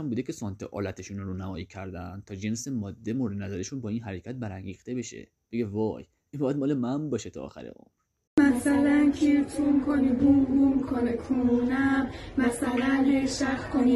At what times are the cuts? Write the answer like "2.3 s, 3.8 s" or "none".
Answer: none

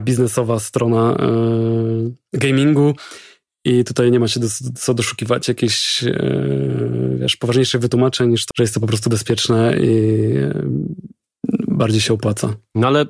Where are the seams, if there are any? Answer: 8.5 s

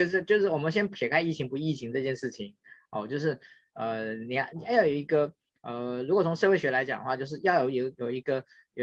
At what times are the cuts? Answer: 4.5 s

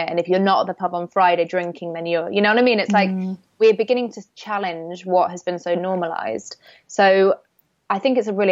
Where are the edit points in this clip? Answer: none

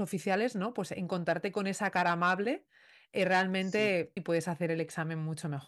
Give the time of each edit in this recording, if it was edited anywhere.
4.2 s

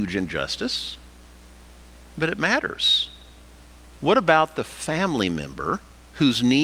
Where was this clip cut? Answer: 4.0 s

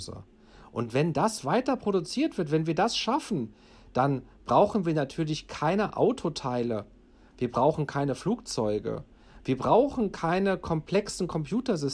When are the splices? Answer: none

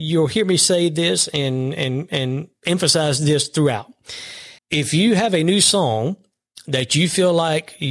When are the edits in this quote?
4.6 s

